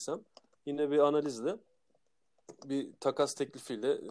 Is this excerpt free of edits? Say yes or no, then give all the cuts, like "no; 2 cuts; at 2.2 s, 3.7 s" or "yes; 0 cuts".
yes; 0 cuts